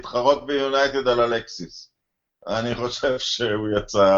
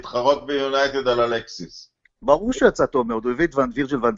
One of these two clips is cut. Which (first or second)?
second